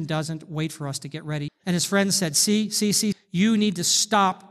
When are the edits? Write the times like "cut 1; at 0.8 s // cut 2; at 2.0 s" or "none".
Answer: cut 1; at 1.5 s // cut 2; at 3.1 s